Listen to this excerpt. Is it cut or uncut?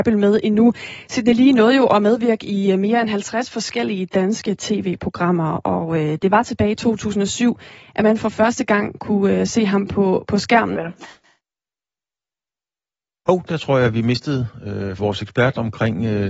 cut